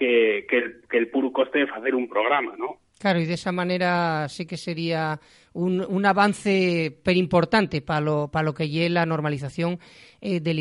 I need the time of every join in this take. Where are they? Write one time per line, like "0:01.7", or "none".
0:02.9